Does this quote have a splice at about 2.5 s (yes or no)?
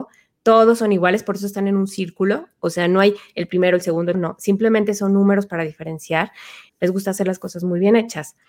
no